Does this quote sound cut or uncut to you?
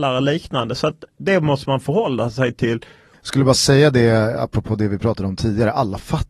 cut